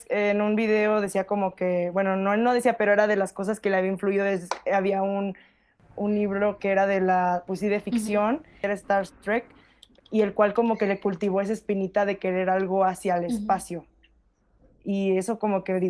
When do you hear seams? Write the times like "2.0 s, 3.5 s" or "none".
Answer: none